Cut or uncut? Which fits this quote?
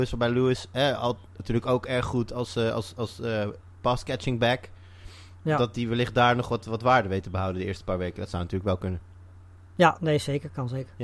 uncut